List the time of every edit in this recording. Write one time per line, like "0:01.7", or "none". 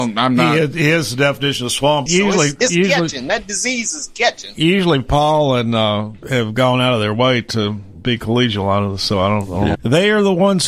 0:02.1
0:06.2
0:09.7